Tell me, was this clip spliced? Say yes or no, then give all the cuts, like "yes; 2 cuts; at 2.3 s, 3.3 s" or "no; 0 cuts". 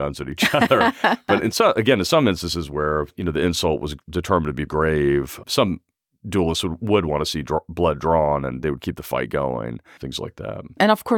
yes; 2 cuts; at 4.7 s, 10.0 s